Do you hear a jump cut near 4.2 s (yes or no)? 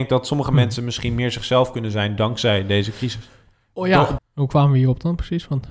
yes